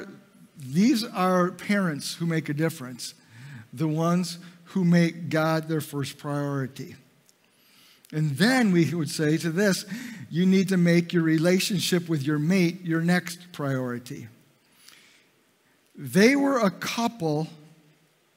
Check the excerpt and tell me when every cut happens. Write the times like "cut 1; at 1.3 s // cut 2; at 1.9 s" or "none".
none

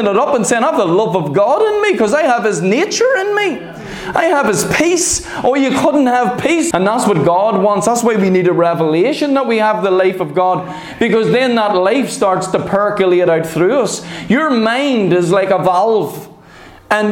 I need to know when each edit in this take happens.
cut 1; at 6.7 s

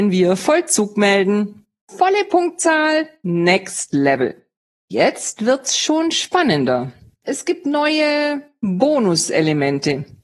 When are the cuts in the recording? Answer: none

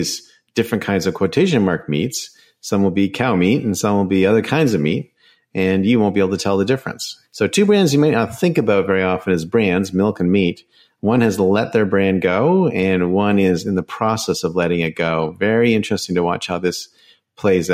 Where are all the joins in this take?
cut 1; at 7.2 s

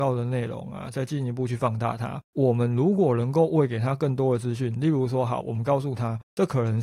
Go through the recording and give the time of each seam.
cut 1; at 2.2 s // cut 2; at 5.4 s

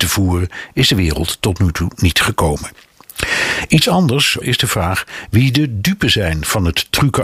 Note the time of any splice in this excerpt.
cut 1; at 4.4 s

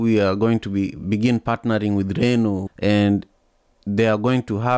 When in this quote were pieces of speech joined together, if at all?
cut 1; at 2.7 s

